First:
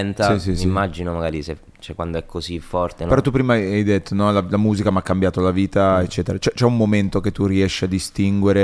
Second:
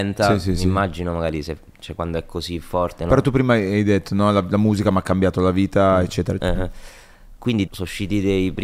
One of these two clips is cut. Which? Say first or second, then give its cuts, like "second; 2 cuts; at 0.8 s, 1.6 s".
second; 2 cuts; at 6.4 s, 7.7 s